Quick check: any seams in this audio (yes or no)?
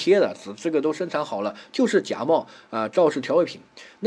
no